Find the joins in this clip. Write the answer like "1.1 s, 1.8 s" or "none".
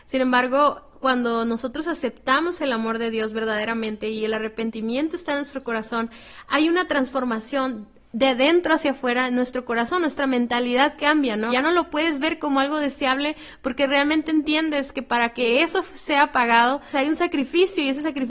11.5 s, 16.9 s